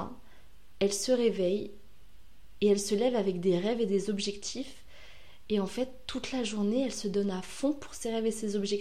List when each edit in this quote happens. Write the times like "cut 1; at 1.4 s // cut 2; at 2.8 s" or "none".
none